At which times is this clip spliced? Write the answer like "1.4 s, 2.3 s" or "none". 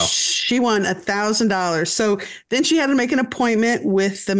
none